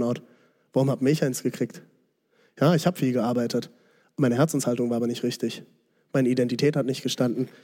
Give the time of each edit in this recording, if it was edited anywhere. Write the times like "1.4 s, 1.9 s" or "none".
none

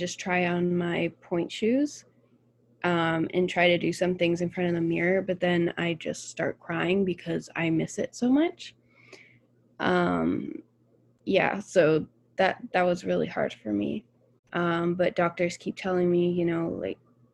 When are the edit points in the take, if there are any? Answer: 14.4 s

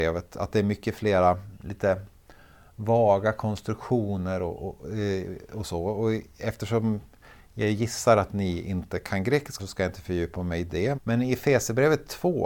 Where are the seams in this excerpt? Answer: 9.6 s, 10.9 s

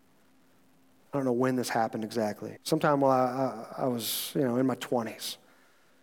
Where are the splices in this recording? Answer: 2.6 s

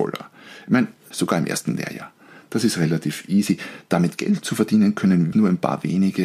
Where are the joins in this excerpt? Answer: 1.1 s, 5.3 s

